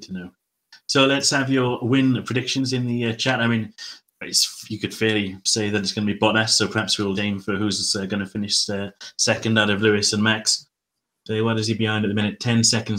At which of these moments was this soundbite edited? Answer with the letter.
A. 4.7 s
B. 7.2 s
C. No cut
B